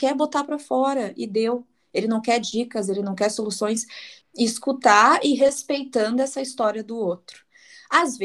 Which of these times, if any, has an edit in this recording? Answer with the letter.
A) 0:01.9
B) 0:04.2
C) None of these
B